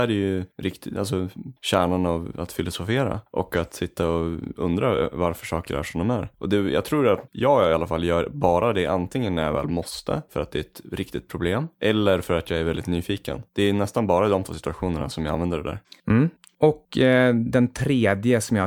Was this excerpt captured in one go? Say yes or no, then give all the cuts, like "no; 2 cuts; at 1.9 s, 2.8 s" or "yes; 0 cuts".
yes; 0 cuts